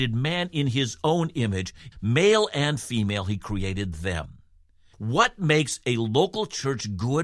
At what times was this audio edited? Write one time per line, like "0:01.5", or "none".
0:01.9
0:04.9